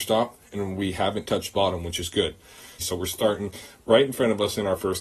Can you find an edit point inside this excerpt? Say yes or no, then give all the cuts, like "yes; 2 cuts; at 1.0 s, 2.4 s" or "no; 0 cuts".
yes; 1 cut; at 2.8 s